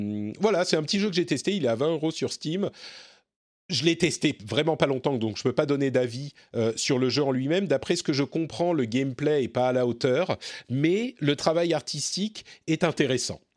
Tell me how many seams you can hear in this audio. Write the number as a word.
zero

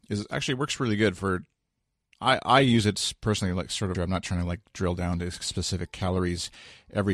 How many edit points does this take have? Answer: one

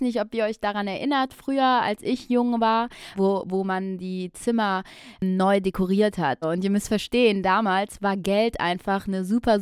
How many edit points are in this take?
two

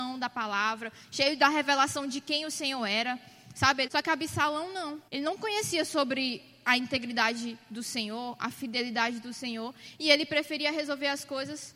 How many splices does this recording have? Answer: two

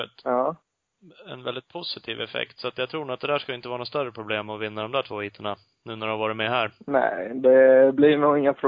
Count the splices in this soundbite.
zero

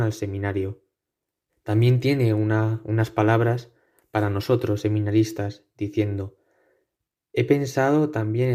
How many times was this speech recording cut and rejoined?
one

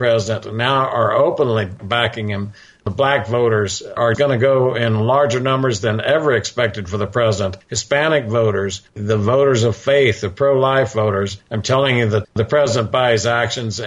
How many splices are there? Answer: one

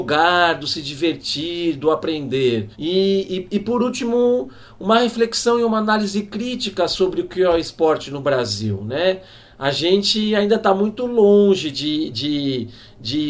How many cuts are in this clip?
one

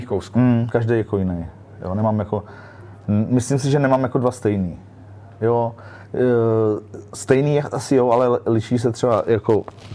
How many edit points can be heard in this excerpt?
zero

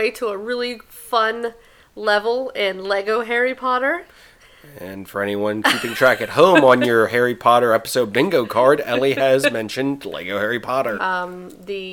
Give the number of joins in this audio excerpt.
one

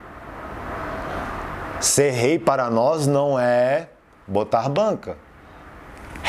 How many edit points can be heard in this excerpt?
zero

